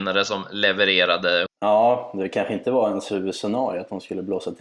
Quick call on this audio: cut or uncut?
cut